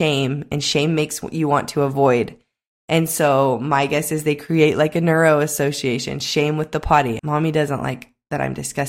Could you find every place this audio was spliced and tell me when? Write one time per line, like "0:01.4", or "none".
0:07.2